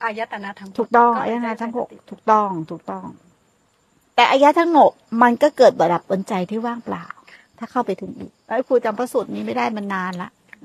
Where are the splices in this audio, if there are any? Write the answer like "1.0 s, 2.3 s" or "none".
8.4 s